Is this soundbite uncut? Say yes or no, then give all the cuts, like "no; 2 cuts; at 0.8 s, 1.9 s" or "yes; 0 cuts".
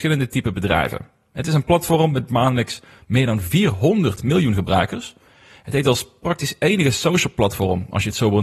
yes; 0 cuts